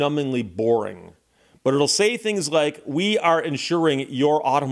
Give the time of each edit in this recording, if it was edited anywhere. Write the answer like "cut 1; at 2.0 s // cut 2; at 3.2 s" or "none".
none